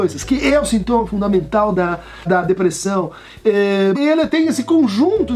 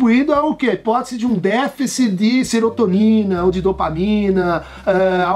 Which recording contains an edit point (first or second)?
first